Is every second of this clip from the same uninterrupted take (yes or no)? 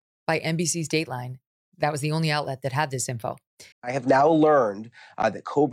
no